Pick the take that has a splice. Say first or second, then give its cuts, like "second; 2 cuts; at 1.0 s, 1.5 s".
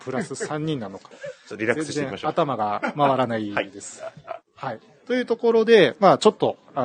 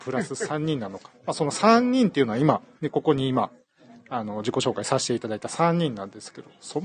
first; 1 cut; at 1.1 s